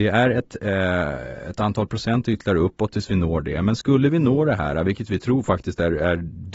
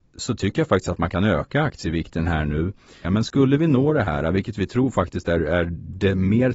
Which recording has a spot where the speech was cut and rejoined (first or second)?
second